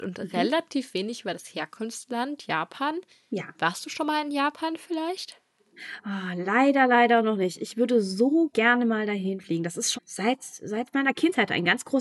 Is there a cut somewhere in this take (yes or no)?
yes